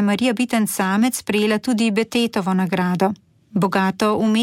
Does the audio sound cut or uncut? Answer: uncut